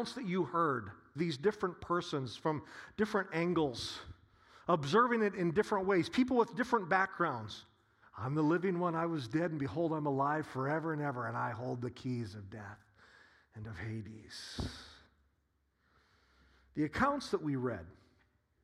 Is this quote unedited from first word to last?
no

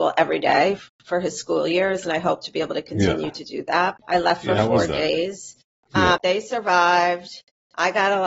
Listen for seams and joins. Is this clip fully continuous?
no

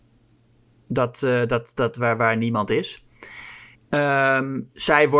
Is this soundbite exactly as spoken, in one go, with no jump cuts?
no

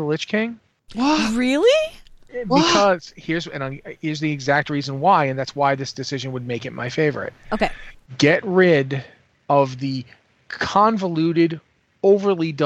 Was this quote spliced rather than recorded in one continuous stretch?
no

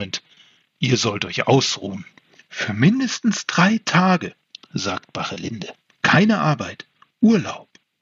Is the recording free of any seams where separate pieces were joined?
yes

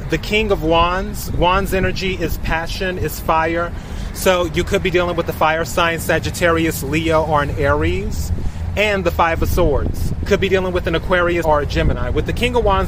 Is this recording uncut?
no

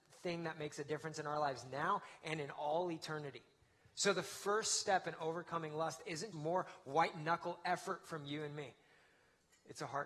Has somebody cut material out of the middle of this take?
yes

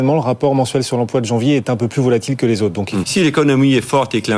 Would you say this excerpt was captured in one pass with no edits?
no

